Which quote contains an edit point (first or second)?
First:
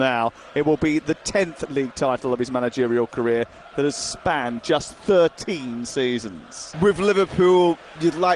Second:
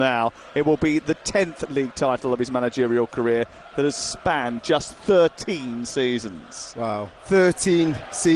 first